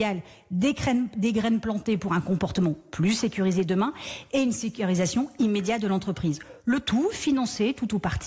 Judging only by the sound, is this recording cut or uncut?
uncut